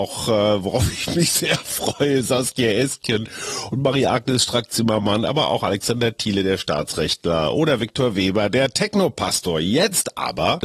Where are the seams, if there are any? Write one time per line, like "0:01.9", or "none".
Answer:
none